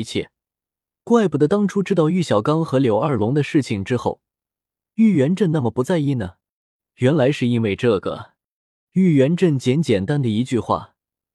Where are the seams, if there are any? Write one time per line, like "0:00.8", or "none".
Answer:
0:08.9
0:10.1